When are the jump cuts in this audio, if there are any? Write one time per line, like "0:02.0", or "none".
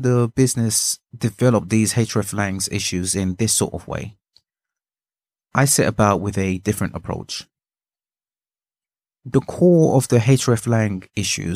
none